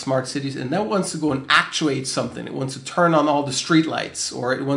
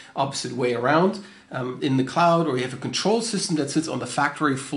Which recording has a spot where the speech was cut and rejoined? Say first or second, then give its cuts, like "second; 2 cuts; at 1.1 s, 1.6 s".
second; 1 cut; at 1.8 s